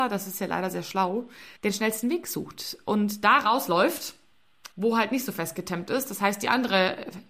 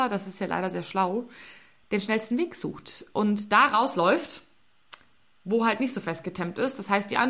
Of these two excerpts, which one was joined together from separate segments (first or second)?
first